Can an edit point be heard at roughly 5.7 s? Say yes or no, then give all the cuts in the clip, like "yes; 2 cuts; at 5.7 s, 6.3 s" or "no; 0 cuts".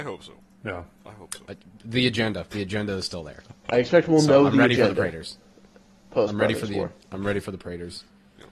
no; 1 cut; at 2.5 s